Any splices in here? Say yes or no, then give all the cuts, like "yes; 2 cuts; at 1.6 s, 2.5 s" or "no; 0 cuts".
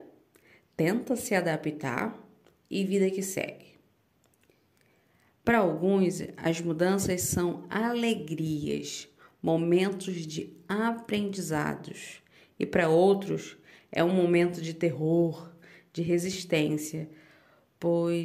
no; 0 cuts